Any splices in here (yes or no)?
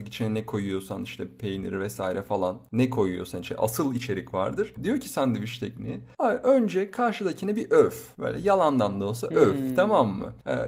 yes